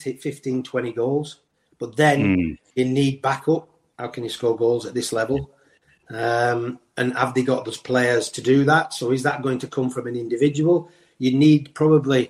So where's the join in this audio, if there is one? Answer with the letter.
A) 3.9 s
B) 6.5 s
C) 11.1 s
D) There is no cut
A